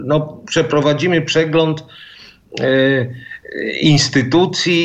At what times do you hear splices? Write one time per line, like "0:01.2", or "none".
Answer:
none